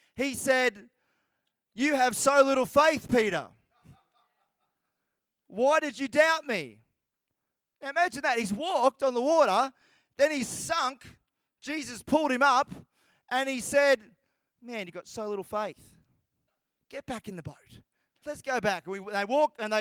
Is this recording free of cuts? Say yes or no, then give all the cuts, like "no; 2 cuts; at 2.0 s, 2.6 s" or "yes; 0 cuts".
no; 2 cuts; at 16.8 s, 18.2 s